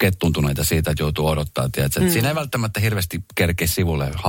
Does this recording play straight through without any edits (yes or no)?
yes